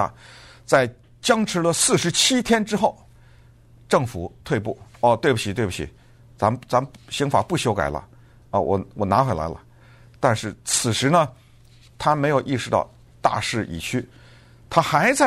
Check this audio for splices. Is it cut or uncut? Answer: uncut